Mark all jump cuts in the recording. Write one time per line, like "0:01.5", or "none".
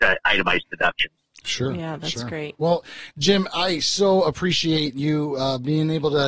0:02.6